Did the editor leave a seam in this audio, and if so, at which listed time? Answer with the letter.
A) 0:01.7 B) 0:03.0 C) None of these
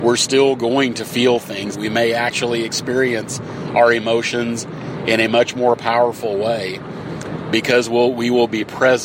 A